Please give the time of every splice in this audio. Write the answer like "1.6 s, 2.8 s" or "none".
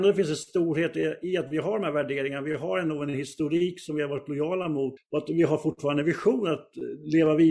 5.0 s